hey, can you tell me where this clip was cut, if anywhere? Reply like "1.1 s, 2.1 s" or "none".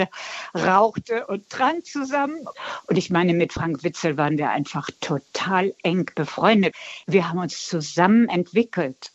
none